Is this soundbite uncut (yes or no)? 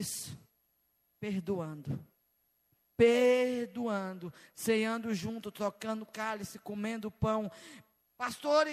yes